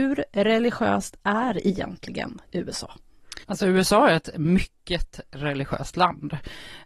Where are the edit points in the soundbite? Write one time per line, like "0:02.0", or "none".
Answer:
0:03.4